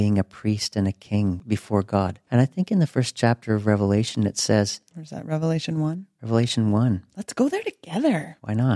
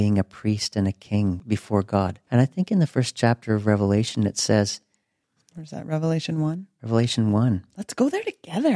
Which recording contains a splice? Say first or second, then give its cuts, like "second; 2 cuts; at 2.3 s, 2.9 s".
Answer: first; 1 cut; at 4.9 s